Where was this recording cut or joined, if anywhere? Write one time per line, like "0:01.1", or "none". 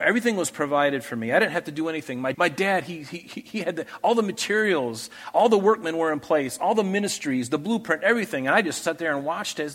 0:02.3